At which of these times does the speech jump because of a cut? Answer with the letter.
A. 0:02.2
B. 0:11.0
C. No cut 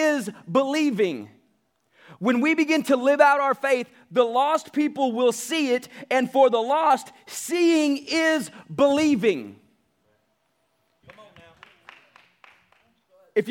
B